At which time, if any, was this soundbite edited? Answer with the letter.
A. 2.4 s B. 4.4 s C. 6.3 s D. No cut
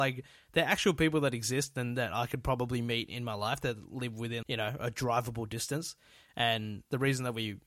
B